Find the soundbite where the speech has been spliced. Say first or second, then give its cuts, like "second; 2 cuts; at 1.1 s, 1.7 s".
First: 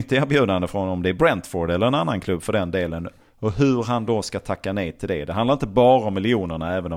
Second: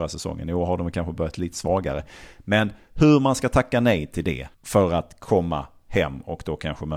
second; 1 cut; at 4.5 s